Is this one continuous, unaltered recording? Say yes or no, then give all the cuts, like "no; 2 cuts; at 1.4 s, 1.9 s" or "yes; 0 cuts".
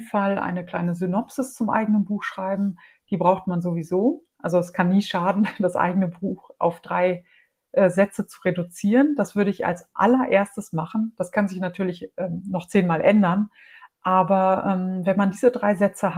yes; 0 cuts